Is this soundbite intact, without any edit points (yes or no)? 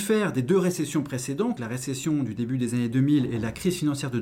no